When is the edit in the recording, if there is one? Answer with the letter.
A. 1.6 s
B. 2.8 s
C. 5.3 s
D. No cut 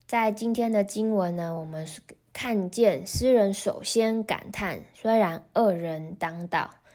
D